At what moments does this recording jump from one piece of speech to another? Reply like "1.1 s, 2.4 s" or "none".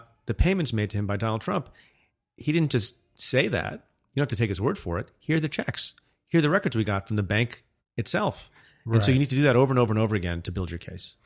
none